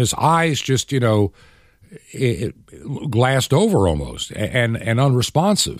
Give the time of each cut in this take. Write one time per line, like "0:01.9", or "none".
none